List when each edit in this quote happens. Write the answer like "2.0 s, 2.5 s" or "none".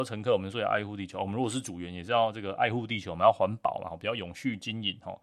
none